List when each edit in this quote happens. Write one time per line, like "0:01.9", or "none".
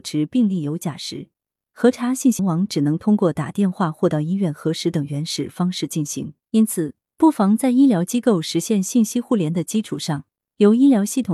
0:02.4
0:06.4